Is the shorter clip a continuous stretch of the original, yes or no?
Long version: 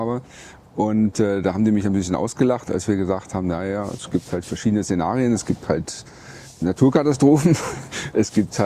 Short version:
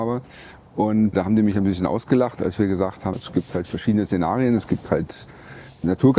no